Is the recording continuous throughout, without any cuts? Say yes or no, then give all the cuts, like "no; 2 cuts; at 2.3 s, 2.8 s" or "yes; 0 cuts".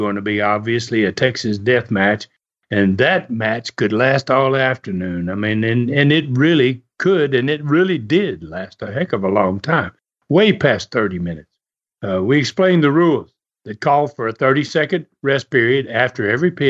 yes; 0 cuts